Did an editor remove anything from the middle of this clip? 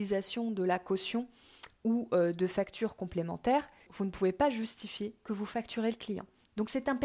yes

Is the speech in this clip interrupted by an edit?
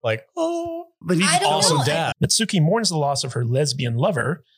yes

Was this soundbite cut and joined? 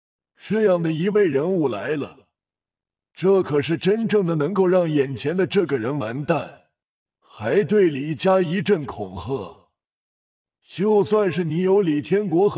yes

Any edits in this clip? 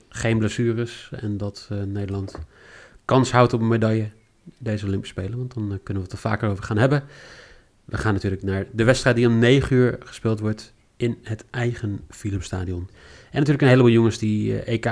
yes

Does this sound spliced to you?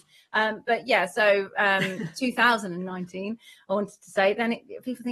no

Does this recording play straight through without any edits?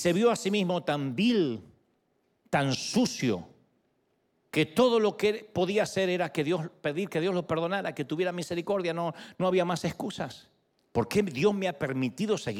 no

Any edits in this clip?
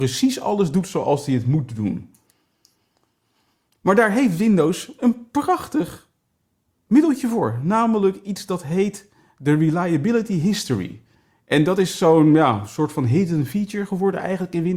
no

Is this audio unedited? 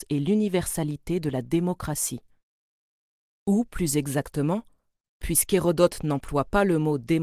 yes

